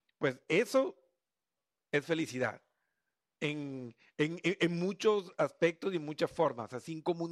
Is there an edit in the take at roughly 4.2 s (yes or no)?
no